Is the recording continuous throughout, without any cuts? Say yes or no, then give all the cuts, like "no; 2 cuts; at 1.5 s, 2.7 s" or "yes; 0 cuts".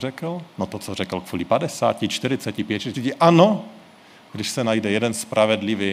no; 1 cut; at 2.9 s